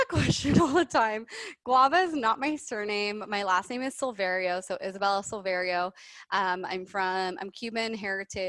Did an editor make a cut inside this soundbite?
no; 0 cuts

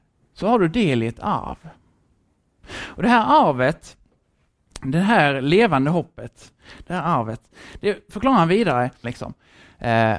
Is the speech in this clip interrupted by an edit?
yes; 1 cut; at 9.0 s

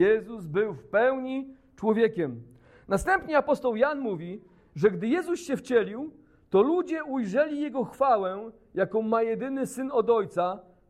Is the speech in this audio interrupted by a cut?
no; 0 cuts

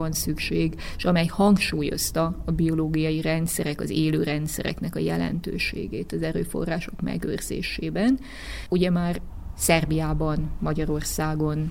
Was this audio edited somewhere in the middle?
no; 0 cuts

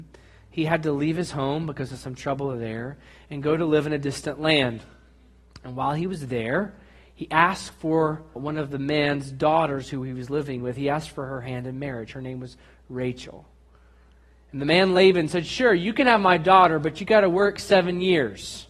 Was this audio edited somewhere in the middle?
yes; 1 cut; at 8.4 s

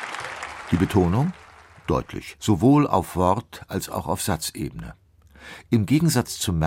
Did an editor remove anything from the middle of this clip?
yes; 1 cut; at 2.4 s

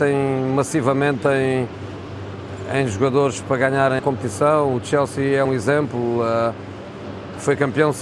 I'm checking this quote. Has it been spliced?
yes; 2 cuts; at 4.0 s, 5.4 s

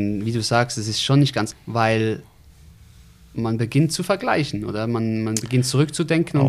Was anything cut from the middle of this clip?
yes; 1 cut; at 1.5 s

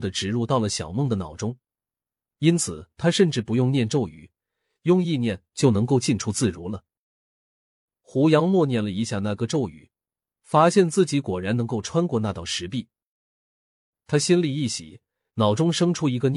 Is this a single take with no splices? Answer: yes; 0 cuts

